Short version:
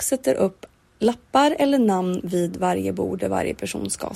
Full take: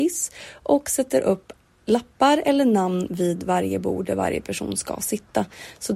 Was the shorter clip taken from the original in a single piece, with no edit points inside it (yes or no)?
yes